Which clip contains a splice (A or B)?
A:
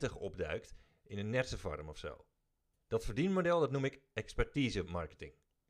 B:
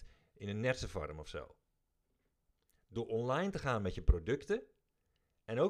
A